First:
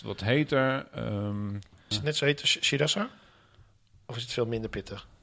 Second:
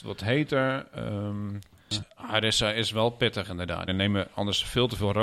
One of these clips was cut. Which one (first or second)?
second